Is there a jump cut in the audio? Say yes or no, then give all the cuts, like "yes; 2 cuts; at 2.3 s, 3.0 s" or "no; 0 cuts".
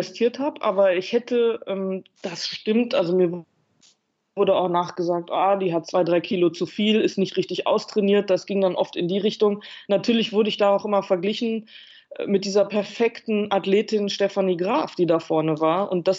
no; 0 cuts